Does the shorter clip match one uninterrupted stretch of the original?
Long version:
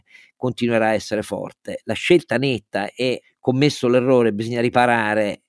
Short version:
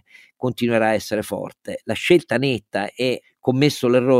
yes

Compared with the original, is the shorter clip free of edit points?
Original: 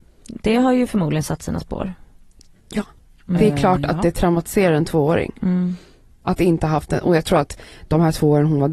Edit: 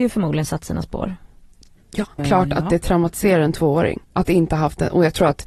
no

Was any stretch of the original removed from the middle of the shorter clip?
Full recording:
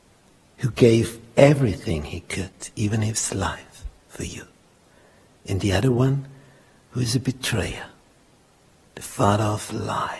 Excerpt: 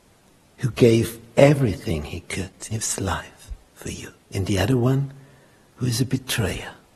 yes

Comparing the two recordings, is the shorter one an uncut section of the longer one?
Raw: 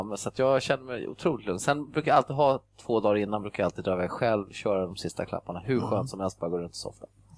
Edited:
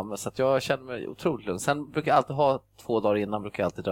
yes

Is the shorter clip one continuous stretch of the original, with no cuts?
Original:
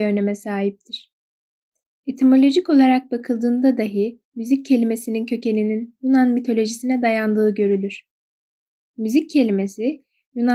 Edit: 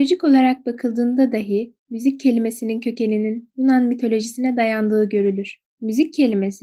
no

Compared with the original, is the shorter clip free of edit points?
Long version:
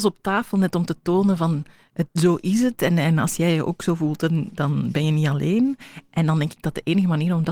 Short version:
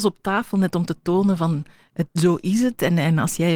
yes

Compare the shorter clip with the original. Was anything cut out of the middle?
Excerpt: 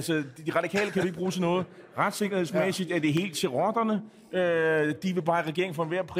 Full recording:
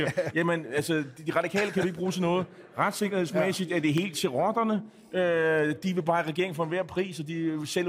no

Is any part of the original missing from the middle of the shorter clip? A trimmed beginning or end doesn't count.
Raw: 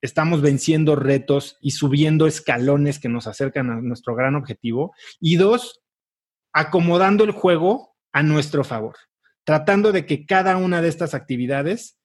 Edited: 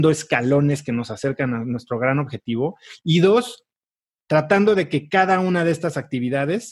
yes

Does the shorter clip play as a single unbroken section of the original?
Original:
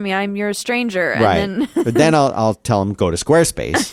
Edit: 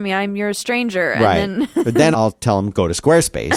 no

